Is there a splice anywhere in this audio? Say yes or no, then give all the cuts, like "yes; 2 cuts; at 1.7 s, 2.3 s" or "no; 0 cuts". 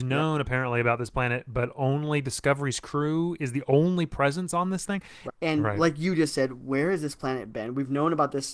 yes; 1 cut; at 5.3 s